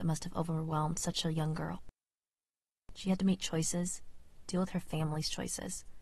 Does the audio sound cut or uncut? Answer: uncut